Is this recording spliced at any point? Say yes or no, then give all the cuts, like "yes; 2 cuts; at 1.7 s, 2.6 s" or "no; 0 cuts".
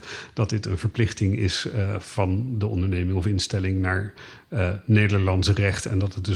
no; 0 cuts